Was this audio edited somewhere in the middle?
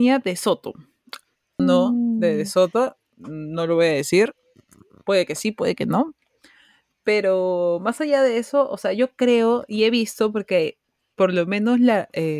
yes; 1 cut; at 1.6 s

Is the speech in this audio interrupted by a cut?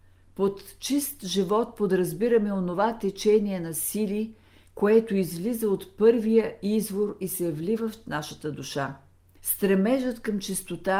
yes; 1 cut; at 9.4 s

